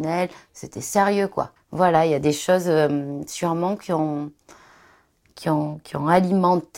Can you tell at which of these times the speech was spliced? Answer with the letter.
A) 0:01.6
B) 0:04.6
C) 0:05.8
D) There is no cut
A